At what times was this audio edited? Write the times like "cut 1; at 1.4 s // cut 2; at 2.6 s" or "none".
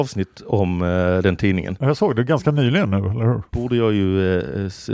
cut 1; at 3.5 s

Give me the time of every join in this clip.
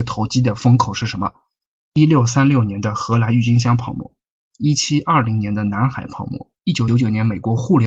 cut 1; at 6.9 s

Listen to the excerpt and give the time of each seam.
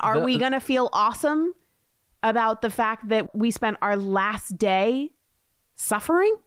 none

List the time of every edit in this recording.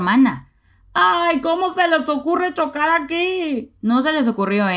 none

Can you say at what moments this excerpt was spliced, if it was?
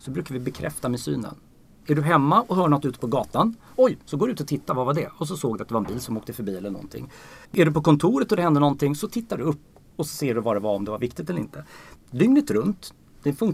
cut 1; at 7.5 s // cut 2; at 12.0 s

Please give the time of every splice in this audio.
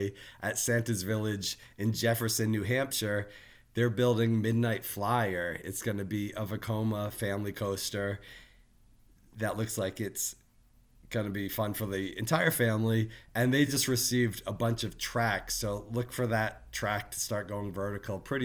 none

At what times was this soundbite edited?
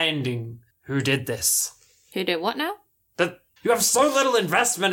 cut 1; at 3.6 s

